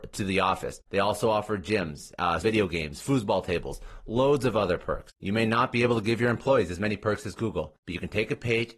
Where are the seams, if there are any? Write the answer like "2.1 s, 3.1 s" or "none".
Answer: 2.4 s